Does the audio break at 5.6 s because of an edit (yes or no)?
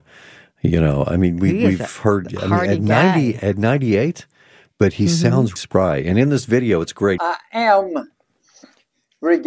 yes